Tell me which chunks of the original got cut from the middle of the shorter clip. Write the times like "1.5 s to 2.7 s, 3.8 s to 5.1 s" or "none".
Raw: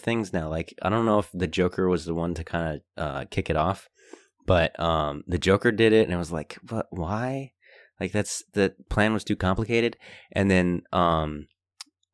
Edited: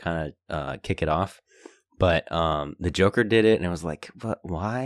none